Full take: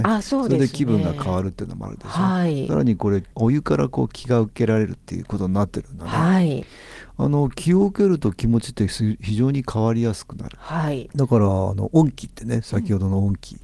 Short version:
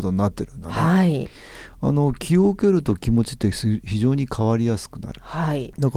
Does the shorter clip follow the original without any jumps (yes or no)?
yes